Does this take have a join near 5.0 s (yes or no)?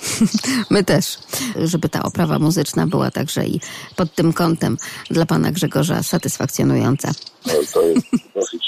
no